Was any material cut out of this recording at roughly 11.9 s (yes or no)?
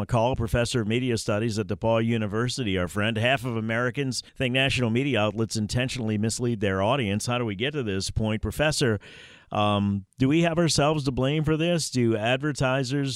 no